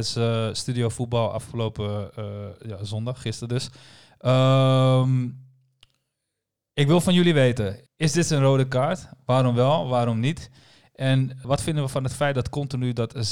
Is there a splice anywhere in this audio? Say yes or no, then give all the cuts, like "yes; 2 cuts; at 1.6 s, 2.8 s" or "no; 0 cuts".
yes; 2 cuts; at 7.9 s, 11.4 s